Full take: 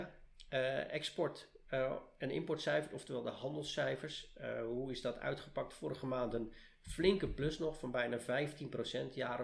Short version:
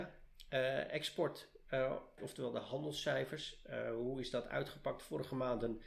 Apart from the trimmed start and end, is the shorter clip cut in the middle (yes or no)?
yes